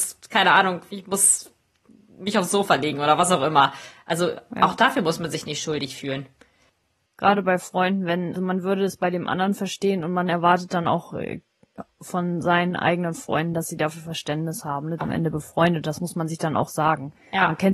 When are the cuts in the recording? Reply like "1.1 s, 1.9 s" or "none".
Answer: 8.3 s, 15.0 s